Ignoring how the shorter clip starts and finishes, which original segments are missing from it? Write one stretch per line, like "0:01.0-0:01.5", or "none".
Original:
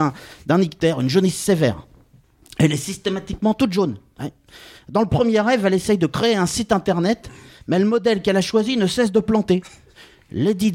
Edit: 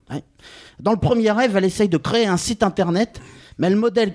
none